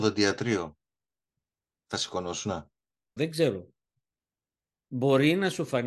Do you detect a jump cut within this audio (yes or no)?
yes